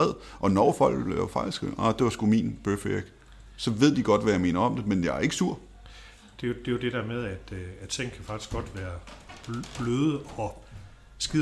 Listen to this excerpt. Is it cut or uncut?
uncut